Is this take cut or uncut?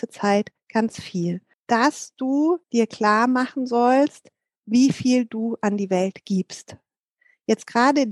cut